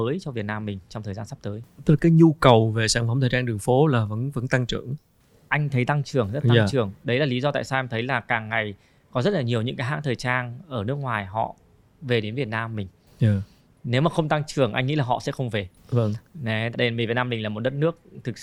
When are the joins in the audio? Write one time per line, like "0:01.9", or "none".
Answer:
0:16.7